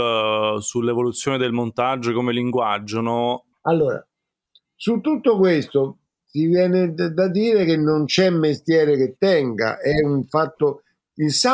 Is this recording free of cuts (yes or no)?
no